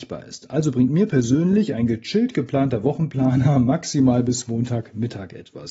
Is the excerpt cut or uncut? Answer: uncut